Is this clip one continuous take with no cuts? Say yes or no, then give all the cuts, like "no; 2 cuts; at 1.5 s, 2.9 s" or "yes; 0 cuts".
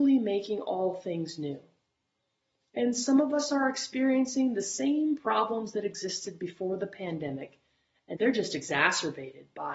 no; 1 cut; at 8.1 s